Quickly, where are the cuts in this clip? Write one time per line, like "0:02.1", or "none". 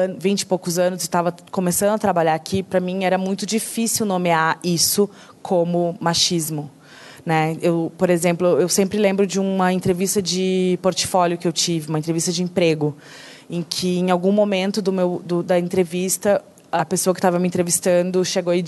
none